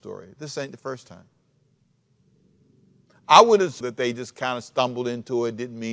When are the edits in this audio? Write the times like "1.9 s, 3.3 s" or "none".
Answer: 3.8 s